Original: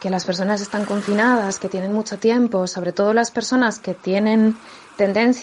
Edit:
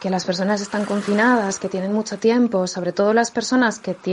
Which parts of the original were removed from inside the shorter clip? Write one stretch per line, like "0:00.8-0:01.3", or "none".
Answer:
none

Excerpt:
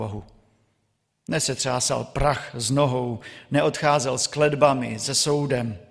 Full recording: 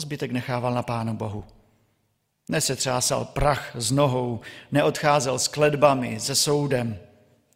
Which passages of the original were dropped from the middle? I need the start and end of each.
none

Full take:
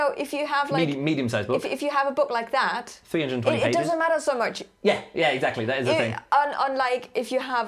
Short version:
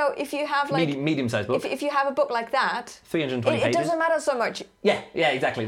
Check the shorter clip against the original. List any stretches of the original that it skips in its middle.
none

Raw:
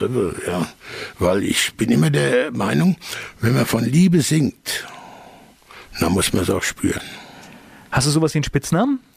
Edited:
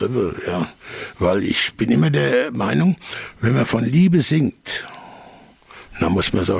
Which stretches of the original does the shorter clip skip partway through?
none

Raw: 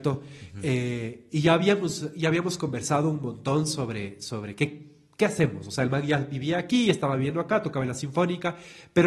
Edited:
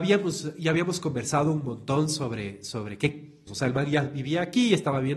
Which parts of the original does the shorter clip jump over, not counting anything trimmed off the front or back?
0:05.0-0:05.6

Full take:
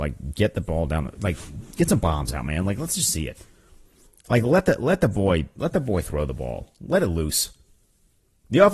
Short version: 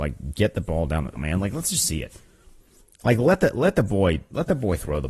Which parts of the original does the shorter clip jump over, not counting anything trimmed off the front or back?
0:01.2-0:02.4

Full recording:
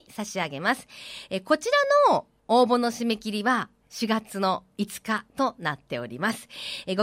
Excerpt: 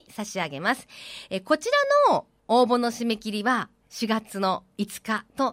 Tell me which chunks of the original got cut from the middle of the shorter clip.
none

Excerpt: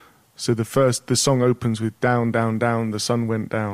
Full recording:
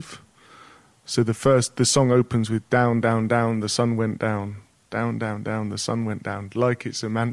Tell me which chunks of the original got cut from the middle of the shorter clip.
none

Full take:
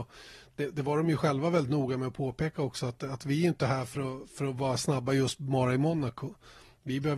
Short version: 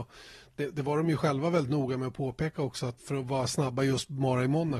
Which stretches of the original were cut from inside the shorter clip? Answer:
0:03.0-0:04.3

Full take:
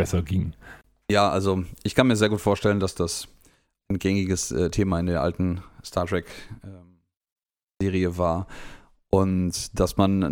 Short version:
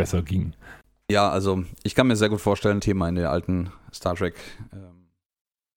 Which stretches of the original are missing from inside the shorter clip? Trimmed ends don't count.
0:02.8-0:04.7

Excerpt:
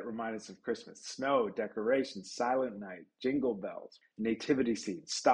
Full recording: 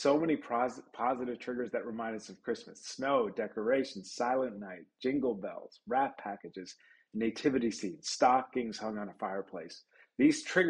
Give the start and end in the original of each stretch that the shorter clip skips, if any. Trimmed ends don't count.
0:05.8-0:07.0

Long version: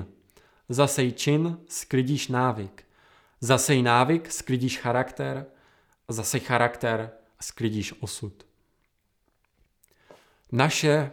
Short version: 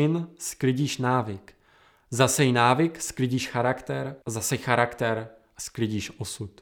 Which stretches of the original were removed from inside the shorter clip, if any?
0:05.5-0:06.0

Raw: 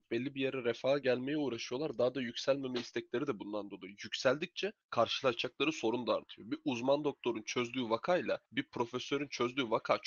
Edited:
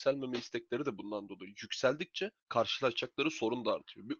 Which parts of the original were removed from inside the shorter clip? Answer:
none

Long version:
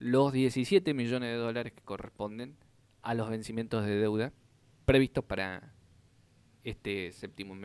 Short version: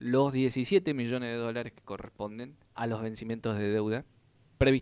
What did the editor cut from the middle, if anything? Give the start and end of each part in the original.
0:02.6-0:02.9

